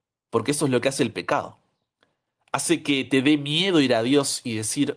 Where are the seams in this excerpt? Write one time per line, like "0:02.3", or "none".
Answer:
none